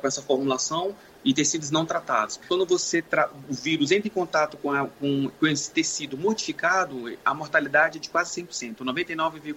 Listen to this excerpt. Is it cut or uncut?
uncut